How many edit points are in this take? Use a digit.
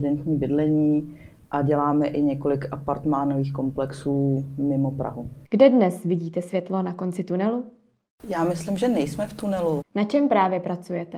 2